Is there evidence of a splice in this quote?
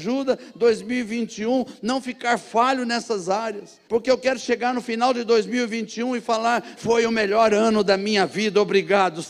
yes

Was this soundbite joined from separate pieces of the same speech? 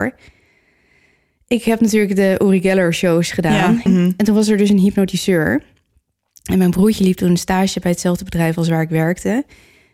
yes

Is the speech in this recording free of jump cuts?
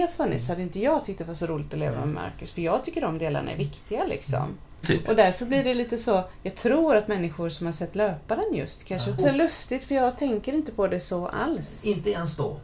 no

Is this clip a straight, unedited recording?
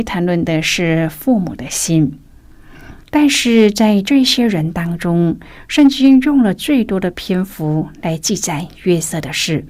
no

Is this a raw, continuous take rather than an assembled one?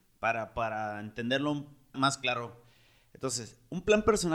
no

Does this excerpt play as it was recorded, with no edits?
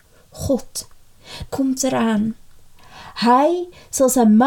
no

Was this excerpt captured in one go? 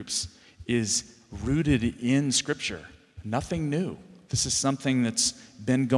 yes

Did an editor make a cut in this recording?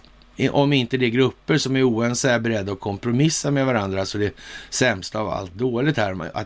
no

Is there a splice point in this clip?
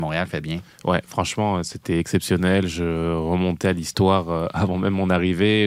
no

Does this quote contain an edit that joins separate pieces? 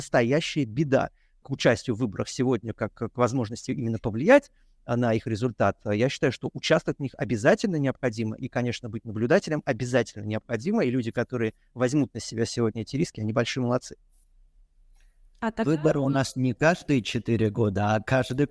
yes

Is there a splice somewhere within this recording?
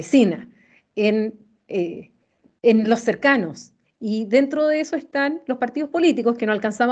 yes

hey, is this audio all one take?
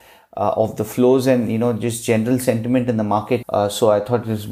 no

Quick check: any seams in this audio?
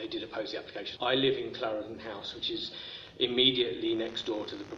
yes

